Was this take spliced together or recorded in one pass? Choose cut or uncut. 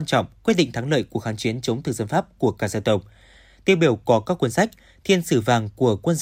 uncut